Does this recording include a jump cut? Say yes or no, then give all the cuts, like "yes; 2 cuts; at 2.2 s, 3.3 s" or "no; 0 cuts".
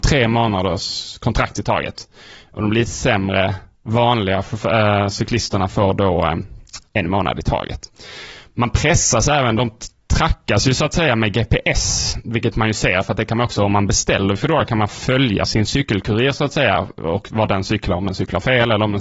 yes; 1 cut; at 15.5 s